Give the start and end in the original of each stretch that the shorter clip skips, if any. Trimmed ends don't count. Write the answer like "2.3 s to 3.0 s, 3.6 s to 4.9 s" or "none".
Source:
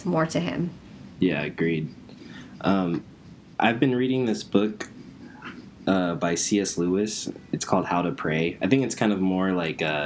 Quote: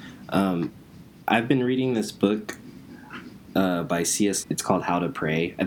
6.8 s to 7.5 s